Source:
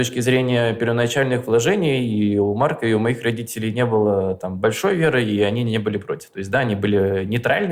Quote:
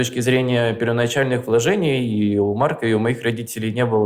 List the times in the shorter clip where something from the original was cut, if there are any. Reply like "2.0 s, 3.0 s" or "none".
none